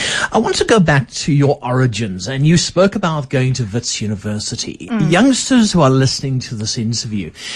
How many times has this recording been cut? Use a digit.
0